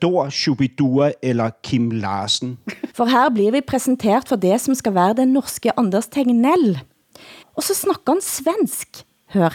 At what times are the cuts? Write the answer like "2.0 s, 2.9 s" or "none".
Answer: 2.9 s, 7.4 s